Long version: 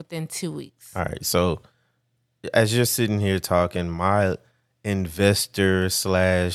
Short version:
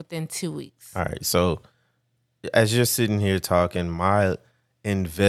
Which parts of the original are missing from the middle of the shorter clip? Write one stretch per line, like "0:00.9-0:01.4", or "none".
none